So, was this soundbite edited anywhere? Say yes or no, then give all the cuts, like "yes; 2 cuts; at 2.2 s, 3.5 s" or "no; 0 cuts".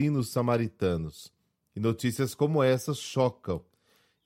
no; 0 cuts